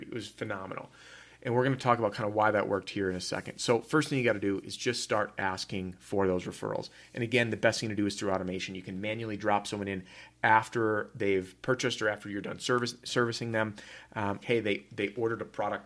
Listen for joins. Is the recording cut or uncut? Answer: cut